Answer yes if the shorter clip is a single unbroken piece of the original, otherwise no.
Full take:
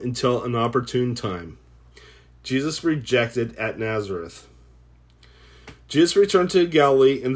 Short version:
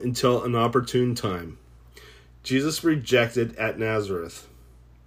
yes